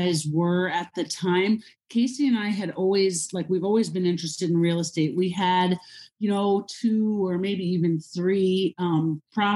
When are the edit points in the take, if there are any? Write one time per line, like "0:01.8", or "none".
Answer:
none

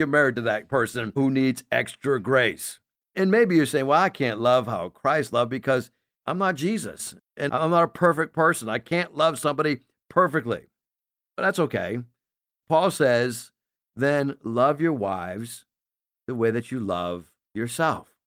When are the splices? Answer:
none

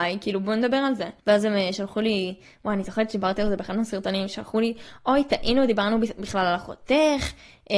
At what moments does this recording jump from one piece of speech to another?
0:01.2

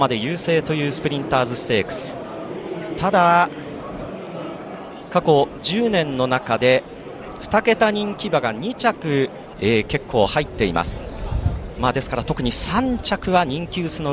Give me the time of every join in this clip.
0:09.5

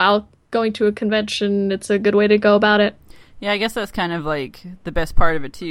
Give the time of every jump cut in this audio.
none

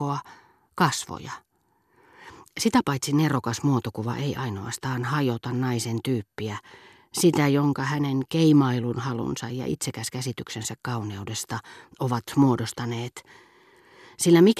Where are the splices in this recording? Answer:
none

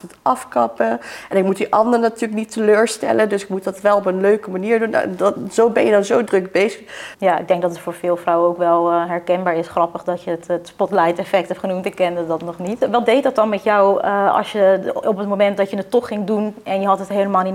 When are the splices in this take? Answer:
0:07.1

